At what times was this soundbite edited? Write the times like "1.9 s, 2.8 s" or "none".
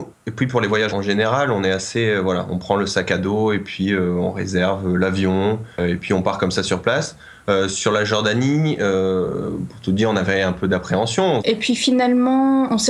0.9 s, 5.7 s, 11.4 s